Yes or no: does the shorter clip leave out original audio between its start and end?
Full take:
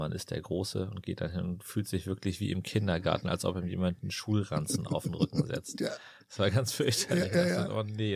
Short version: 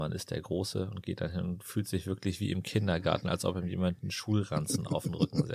no